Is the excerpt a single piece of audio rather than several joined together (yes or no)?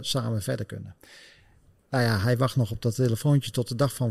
yes